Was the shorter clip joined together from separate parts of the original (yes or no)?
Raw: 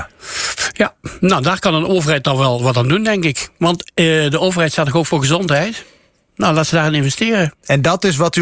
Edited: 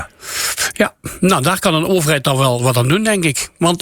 no